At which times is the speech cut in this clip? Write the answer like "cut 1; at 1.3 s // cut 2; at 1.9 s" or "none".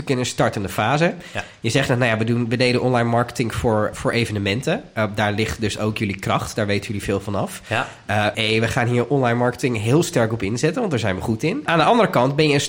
cut 1; at 3.9 s // cut 2; at 8.3 s // cut 3; at 11.7 s